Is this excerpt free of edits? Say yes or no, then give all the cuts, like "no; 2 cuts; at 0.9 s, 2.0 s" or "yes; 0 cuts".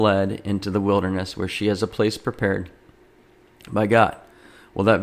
yes; 0 cuts